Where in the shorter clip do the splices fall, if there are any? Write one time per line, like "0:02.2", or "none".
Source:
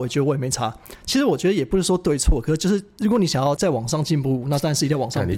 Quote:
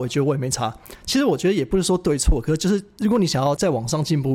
none

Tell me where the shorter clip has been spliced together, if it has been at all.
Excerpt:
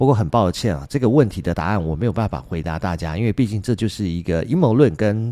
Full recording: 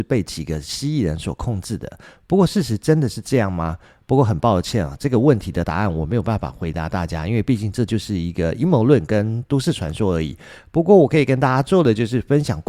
none

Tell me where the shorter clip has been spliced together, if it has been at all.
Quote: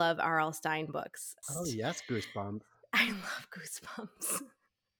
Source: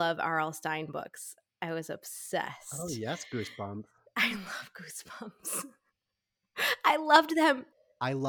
0:01.4

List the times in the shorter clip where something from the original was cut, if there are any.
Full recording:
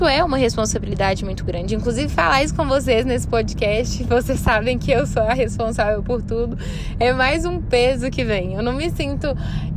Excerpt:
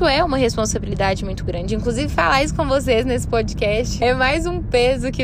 0:04.0

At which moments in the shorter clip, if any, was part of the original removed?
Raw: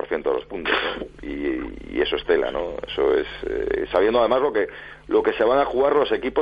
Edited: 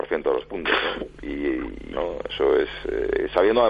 0:01.9

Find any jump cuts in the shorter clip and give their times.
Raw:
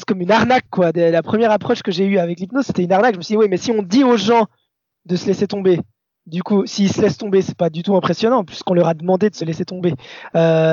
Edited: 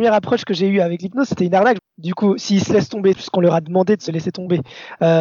0:01.8
0:03.1

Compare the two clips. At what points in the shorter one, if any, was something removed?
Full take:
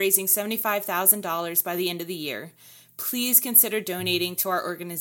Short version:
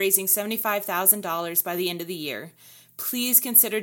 none

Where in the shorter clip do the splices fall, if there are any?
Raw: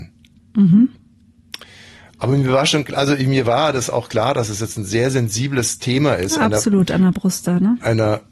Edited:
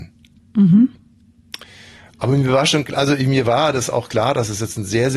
none

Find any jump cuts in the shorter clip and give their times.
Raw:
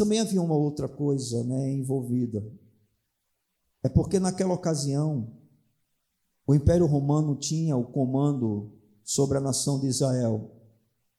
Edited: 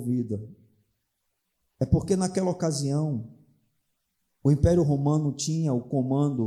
none

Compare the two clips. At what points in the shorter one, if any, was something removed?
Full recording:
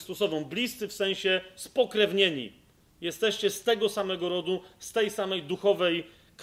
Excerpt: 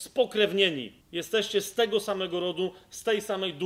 0:01.0

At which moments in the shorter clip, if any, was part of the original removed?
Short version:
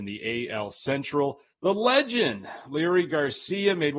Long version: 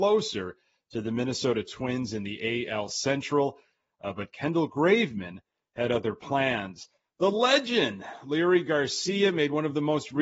0:01.5

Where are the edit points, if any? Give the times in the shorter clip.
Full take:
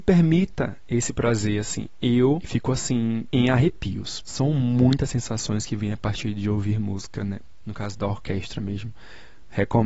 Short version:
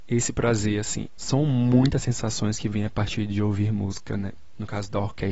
0:01.2

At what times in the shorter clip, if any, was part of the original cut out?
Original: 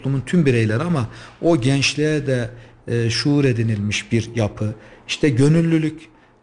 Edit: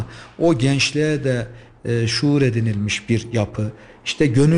none

